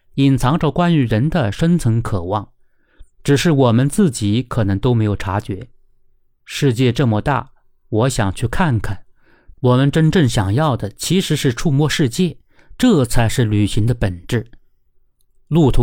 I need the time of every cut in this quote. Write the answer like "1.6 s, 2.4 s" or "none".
9.5 s